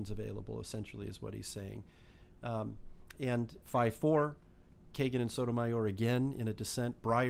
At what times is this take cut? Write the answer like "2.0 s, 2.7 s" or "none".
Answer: 3.6 s